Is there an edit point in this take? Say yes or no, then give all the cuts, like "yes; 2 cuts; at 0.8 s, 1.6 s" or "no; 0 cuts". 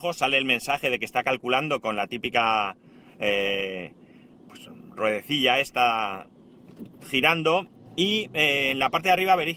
no; 0 cuts